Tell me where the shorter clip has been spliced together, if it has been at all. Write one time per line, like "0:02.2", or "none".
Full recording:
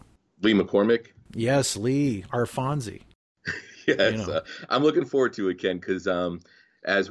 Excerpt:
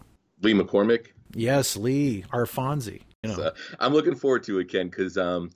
0:03.2

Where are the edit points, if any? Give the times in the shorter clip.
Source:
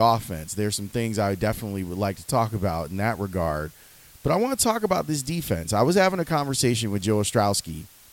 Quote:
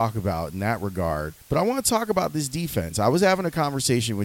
0:01.4

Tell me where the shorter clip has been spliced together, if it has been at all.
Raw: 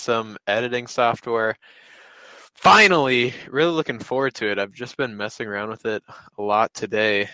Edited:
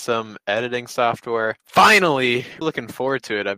0:01.6
0:02.6

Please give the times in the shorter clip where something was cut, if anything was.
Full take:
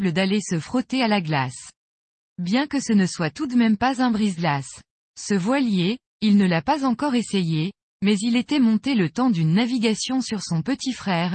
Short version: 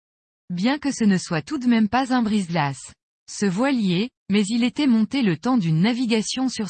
0:04.2

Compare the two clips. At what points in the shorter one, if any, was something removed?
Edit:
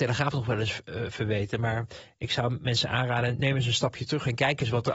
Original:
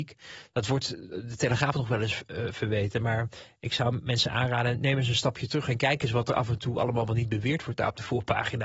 none

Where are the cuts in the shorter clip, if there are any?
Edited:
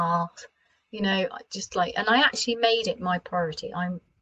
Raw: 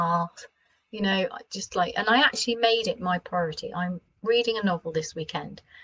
none

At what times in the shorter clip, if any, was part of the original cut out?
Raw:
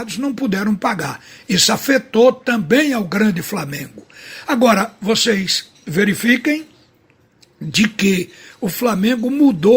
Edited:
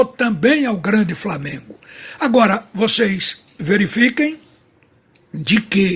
none

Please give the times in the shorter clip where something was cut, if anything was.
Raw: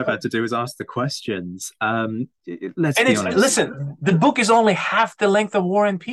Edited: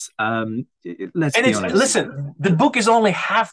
none

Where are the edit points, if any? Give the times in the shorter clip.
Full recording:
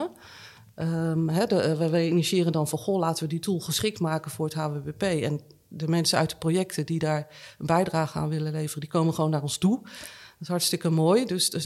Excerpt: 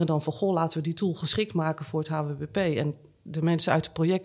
none

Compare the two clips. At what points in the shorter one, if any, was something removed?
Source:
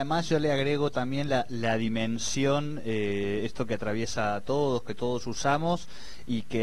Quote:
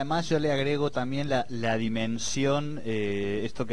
none

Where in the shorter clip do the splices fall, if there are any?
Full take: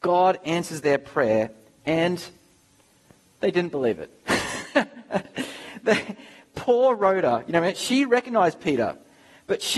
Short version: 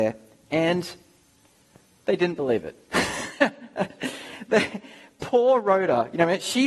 none

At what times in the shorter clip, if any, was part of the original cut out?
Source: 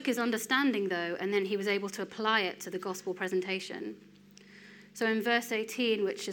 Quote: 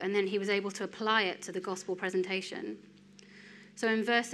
none

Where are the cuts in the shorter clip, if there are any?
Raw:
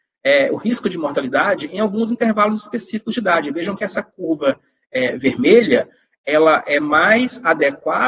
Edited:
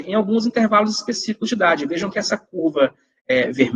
none

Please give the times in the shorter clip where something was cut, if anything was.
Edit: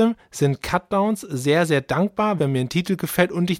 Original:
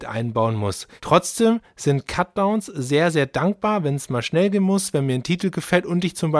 0:02.4

